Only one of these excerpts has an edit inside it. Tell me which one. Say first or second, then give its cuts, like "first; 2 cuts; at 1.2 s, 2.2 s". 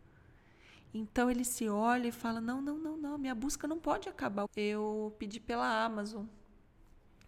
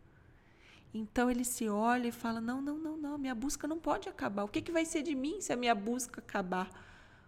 first; 1 cut; at 4.5 s